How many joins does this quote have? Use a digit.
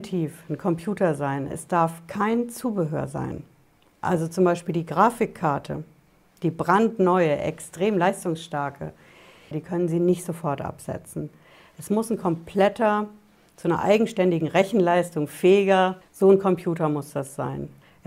2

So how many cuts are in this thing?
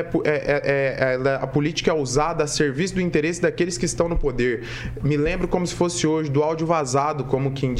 0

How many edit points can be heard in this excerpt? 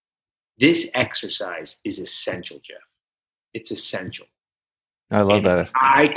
0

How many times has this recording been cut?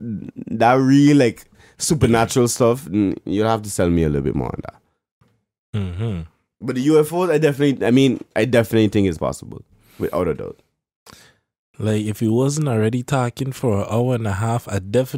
0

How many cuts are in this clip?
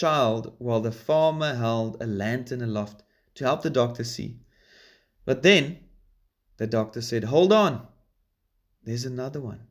0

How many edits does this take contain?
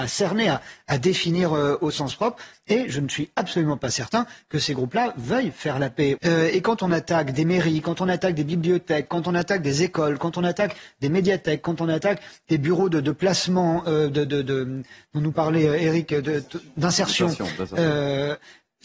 1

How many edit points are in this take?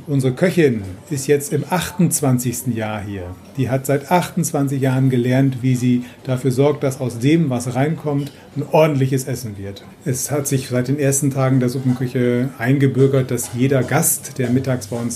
2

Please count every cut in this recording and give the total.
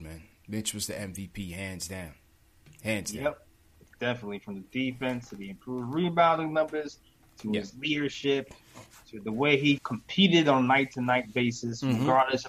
1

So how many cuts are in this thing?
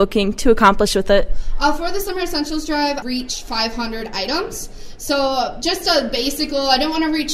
1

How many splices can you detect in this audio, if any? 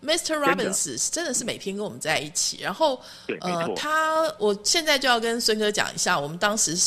1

